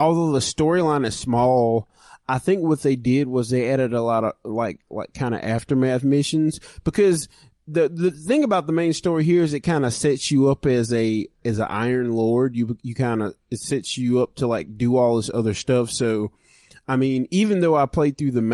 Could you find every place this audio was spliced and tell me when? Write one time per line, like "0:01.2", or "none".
none